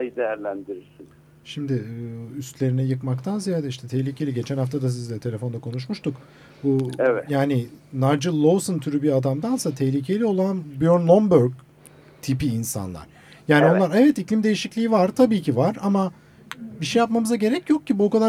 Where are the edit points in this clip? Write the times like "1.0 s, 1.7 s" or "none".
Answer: none